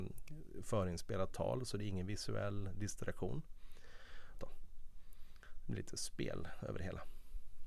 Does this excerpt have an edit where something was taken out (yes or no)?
yes